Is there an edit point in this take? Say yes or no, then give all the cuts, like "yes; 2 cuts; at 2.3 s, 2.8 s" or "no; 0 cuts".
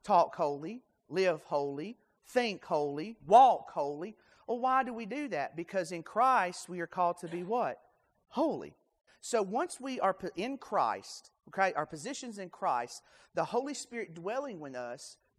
yes; 2 cuts; at 3.2 s, 9.1 s